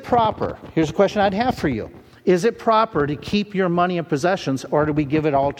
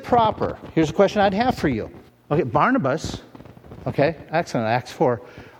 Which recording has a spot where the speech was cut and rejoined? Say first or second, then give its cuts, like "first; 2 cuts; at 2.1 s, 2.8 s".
second; 1 cut; at 2.1 s